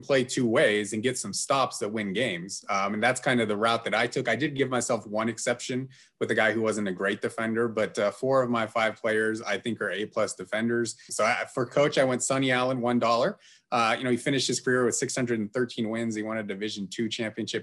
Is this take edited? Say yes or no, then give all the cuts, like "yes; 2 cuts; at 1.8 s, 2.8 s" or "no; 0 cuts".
yes; 1 cut; at 11.1 s